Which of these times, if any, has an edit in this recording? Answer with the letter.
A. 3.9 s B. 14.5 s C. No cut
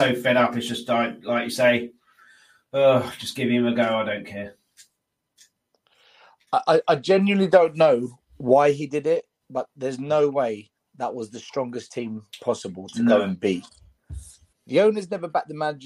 B